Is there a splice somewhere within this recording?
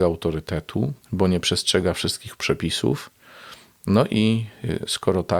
yes; 1 cut; at 1.0 s

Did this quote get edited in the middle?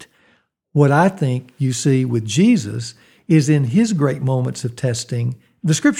no; 0 cuts

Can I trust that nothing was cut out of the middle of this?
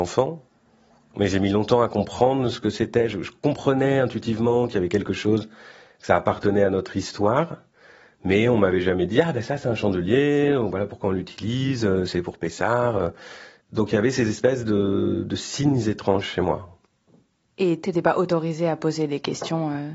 yes; 0 cuts

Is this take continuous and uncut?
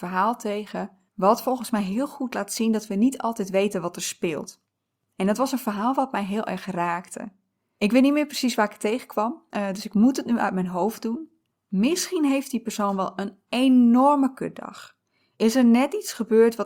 no; 1 cut; at 11.5 s

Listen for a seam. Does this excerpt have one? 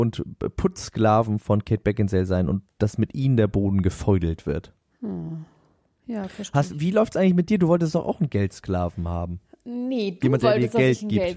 no; 0 cuts

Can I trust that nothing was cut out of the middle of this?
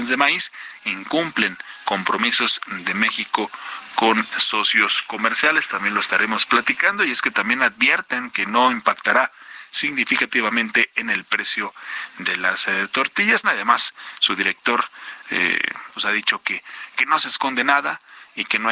no; 2 cuts; at 13.4 s, 15.9 s

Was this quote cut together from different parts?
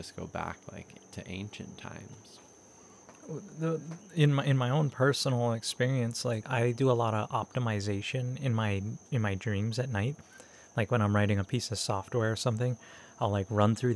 yes; 1 cut; at 6.4 s

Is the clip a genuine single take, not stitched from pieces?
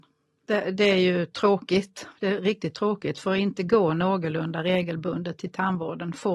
yes; 0 cuts

